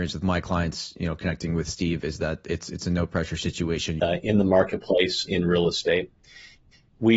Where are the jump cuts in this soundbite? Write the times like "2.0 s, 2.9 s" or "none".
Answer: 4.0 s, 5.3 s